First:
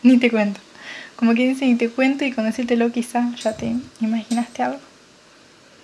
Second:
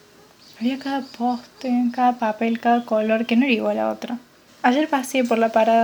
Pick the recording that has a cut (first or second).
second